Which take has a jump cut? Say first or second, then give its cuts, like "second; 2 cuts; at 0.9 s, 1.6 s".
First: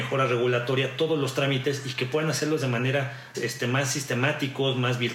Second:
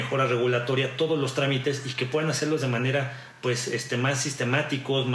first; 1 cut; at 3.3 s